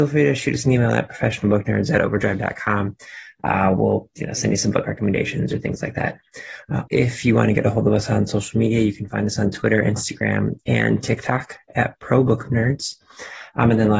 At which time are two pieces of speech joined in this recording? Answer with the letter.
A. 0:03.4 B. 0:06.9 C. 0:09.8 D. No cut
B